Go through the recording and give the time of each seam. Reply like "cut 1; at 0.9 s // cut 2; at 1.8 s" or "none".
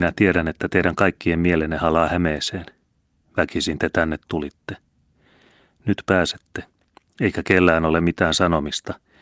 none